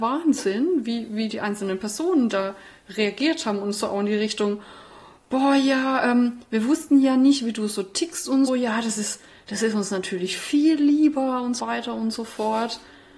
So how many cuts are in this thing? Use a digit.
2